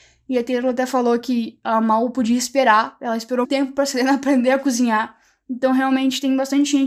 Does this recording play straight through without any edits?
no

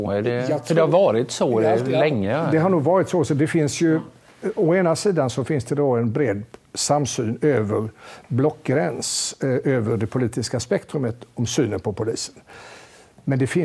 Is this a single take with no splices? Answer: yes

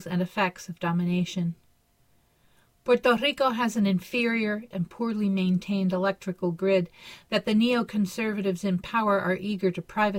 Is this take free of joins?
no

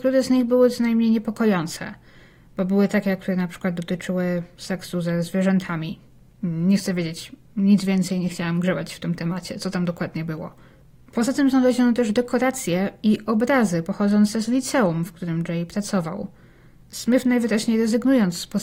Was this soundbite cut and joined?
no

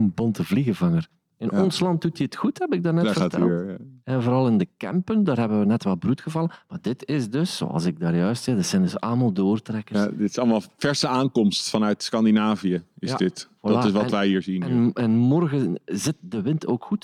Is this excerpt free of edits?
yes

